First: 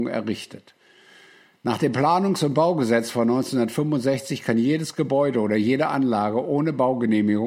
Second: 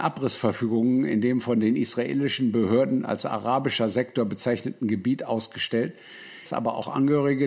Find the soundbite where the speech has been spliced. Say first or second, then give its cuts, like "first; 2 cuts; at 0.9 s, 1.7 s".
second; 1 cut; at 6.4 s